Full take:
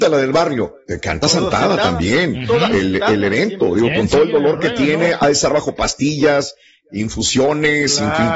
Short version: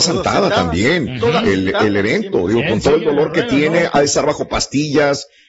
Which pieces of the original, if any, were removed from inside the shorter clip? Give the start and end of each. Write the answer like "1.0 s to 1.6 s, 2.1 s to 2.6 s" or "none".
none